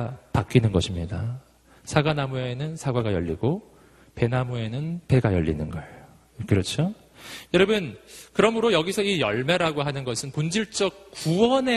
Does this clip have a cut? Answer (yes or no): no